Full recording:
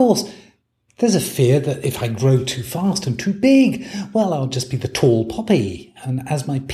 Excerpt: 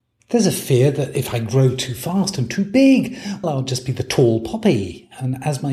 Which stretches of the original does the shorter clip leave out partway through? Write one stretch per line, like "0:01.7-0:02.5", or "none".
0:04.1-0:04.3